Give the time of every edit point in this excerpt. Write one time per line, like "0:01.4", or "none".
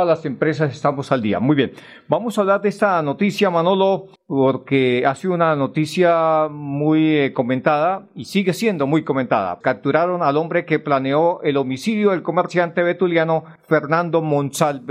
0:09.6

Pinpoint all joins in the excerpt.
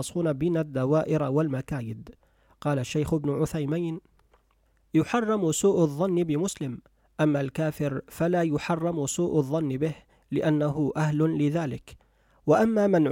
none

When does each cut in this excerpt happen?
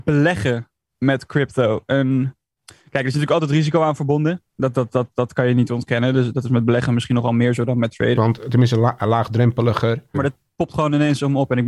0:08.2
0:10.1

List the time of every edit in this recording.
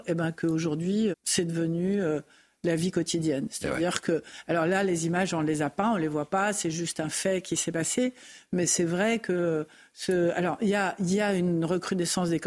0:01.1

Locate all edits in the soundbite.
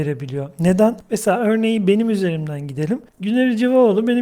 0:03.1

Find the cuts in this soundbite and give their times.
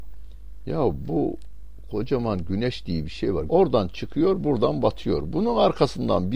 0:03.5

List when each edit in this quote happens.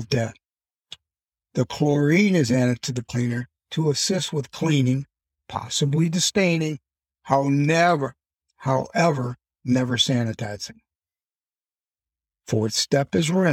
none

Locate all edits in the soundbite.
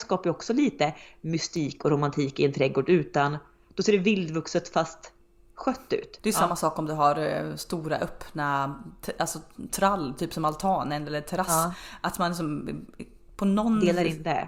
0:06.2

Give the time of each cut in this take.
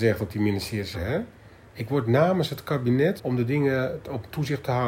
0:00.9
0:03.2

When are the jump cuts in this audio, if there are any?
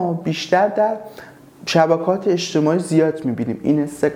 none

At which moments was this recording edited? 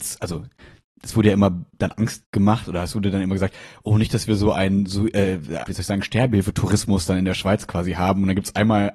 0:05.7

